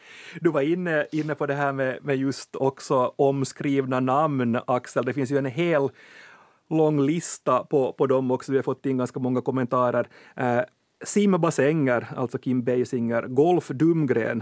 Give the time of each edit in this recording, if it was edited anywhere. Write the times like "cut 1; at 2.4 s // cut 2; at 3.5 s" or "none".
none